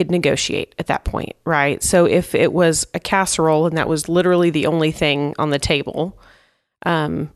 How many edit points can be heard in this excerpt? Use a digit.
0